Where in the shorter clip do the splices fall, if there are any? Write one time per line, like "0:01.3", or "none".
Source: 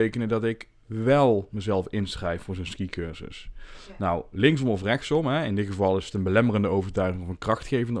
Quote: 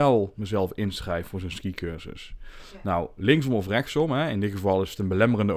none